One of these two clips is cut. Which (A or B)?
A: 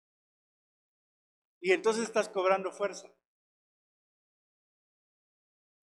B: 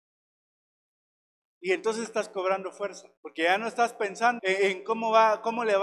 B